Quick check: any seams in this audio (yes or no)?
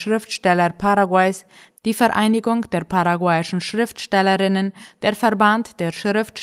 no